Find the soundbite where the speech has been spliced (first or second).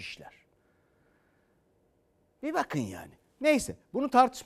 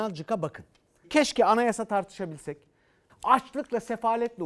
second